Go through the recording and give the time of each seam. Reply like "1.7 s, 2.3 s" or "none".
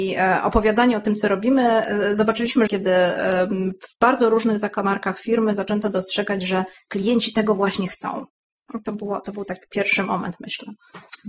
2.7 s